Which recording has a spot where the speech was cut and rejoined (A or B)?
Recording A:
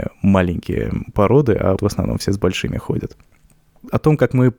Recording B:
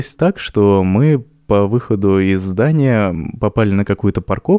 A